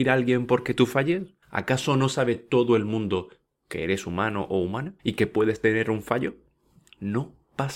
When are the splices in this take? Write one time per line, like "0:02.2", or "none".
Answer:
0:01.4
0:05.0